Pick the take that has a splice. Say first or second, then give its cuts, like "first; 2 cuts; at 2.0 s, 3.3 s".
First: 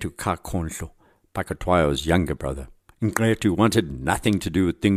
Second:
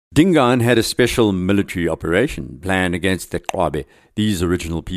first; 1 cut; at 2.9 s